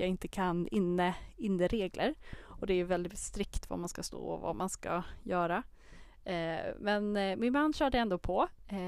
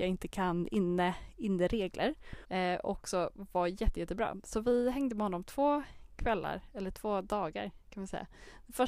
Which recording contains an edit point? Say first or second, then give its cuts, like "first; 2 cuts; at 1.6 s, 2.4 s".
second; 1 cut; at 2.4 s